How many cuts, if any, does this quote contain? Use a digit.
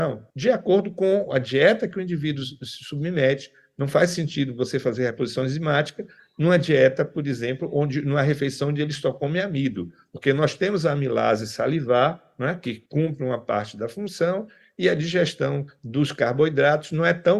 0